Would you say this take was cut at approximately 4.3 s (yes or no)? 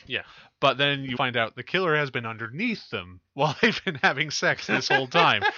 no